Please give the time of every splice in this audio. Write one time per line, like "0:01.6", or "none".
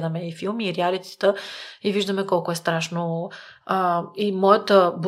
0:03.6